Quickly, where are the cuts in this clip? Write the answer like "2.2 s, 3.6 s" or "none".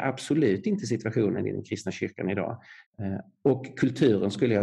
2.9 s